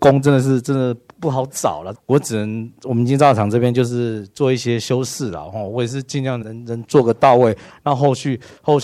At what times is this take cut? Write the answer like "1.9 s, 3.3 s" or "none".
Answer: 1.9 s, 6.4 s